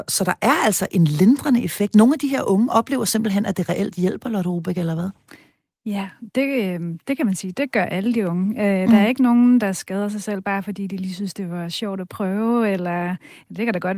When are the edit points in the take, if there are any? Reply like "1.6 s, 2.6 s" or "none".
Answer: none